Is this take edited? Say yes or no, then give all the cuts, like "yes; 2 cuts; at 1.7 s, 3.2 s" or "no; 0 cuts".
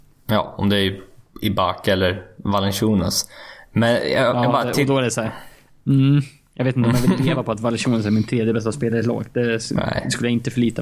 no; 0 cuts